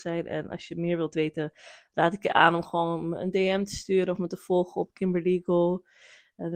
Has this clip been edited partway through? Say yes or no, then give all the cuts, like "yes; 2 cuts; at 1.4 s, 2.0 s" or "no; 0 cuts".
no; 0 cuts